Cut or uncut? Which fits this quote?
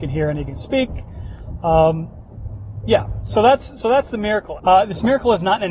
cut